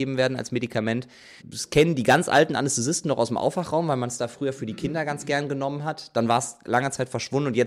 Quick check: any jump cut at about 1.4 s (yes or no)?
yes